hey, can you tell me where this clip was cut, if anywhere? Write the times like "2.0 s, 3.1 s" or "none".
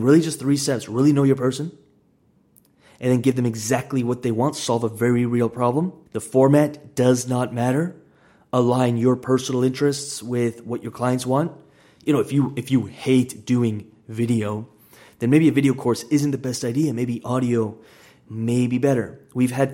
6.1 s

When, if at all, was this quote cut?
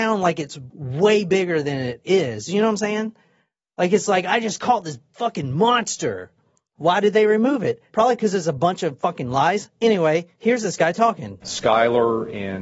6.8 s, 7.9 s

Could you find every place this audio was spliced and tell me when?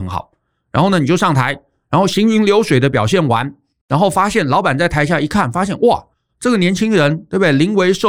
none

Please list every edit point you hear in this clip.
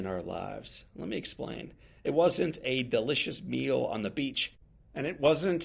2.0 s

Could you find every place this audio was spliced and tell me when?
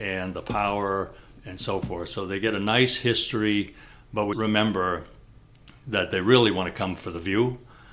4.3 s

